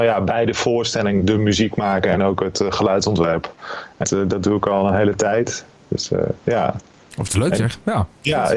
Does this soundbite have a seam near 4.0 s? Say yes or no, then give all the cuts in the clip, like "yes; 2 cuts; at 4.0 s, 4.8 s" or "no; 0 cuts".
yes; 1 cut; at 4.0 s